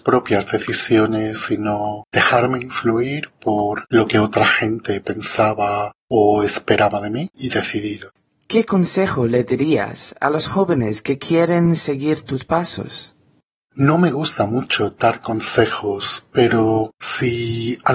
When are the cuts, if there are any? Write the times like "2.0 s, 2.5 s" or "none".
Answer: 7.3 s